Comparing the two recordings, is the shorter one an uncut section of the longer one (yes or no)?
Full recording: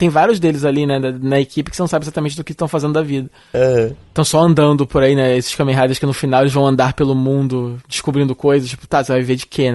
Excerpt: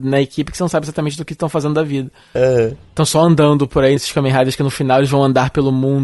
no